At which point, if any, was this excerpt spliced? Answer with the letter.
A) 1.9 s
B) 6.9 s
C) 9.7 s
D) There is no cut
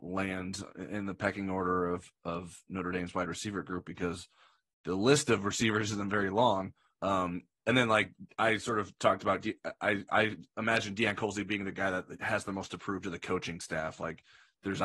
B